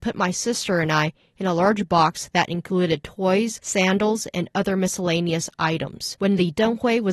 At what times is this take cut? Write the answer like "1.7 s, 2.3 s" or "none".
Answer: 6.2 s